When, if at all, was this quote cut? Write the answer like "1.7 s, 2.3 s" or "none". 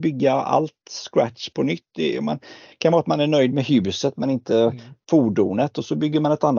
none